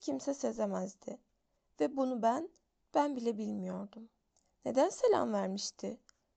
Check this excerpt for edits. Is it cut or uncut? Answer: uncut